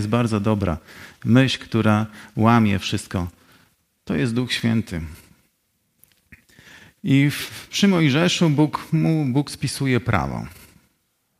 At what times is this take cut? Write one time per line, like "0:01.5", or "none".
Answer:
none